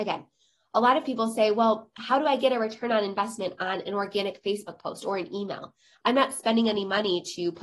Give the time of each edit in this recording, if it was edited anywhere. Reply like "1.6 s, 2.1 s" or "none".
none